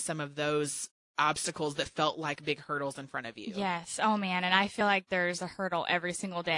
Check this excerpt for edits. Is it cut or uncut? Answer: uncut